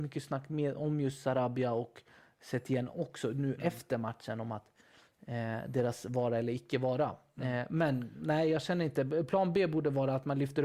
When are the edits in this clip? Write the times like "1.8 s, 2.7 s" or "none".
none

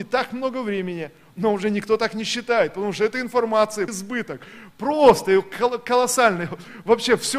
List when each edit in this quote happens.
3.9 s

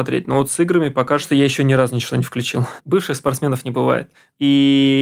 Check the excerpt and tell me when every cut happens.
2.8 s

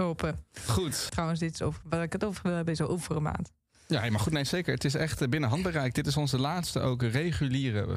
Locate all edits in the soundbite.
1.1 s

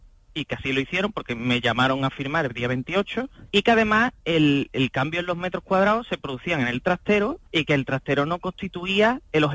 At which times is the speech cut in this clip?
3.5 s, 7.5 s

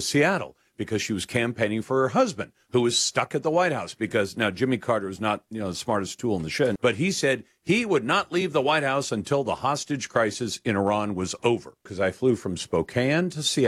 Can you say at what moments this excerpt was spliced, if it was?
6.8 s, 11.9 s

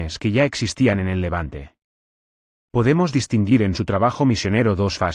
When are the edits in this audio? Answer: none

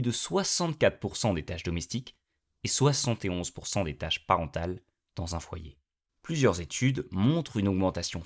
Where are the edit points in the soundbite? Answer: 6.1 s

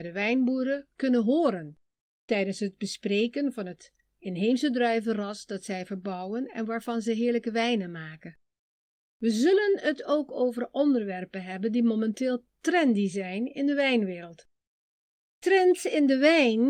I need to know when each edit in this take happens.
none

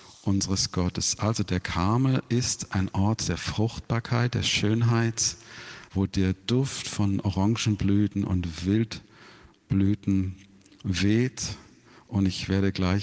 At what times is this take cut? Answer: 5.9 s

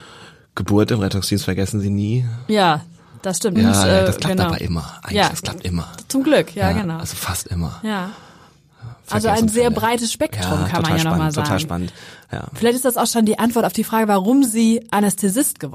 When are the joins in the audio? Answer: 3.6 s

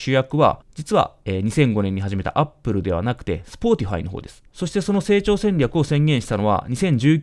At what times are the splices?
4.5 s

